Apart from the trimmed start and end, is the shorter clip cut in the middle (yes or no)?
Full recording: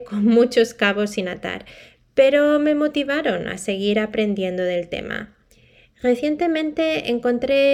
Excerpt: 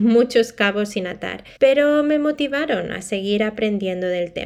yes